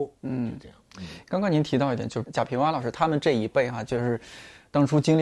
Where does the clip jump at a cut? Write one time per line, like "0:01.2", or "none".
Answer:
none

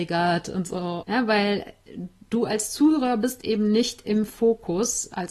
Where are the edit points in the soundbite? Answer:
0:01.0

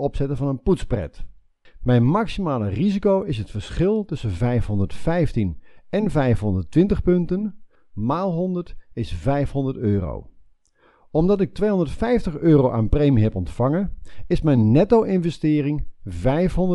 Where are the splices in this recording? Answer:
0:01.7
0:07.7

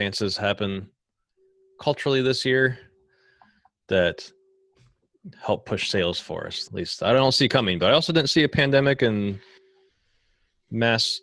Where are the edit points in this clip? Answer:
0:06.7

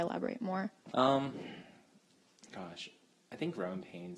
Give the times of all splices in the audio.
0:00.9

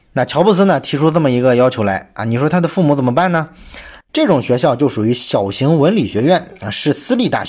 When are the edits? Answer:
0:04.0

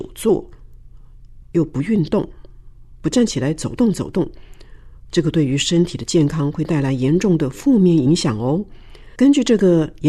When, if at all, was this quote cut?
0:09.2

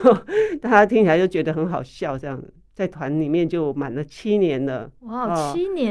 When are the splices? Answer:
0:02.6

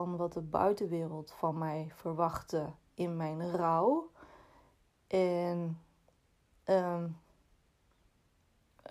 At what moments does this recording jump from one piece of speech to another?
none

